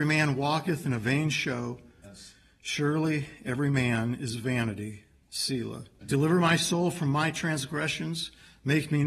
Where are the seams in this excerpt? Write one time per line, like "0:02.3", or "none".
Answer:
0:02.0
0:06.0